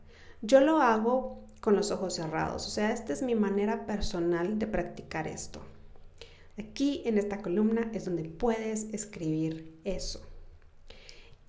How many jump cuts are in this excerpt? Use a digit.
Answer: 1